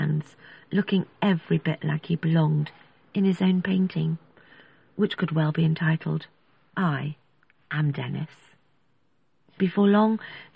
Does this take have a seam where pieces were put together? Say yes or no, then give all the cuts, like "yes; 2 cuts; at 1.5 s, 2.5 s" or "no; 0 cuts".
yes; 1 cut; at 9.6 s